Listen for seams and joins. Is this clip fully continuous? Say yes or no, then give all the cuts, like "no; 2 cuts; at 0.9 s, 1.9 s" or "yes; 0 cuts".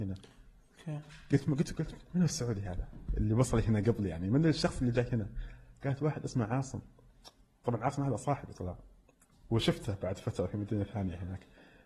yes; 0 cuts